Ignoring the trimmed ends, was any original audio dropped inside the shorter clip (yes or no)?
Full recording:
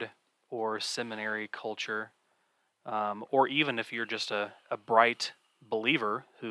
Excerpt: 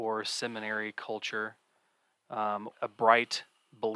yes